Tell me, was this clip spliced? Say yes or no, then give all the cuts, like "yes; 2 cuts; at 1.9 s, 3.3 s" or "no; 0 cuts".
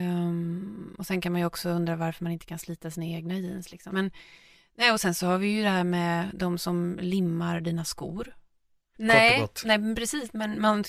yes; 2 cuts; at 3.9 s, 8.9 s